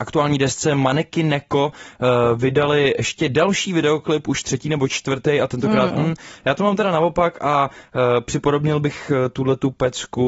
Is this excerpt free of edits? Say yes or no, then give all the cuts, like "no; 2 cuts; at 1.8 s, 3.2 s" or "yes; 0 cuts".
no; 1 cut; at 5.9 s